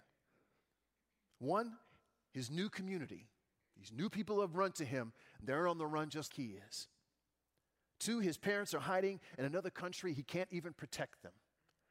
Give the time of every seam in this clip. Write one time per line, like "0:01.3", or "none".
0:06.3